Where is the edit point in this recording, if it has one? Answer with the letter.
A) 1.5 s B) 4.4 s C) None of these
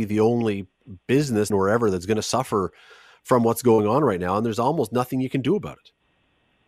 A